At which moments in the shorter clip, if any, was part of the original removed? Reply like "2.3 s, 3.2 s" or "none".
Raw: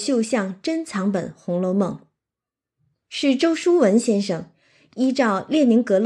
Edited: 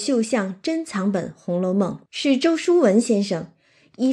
2.1 s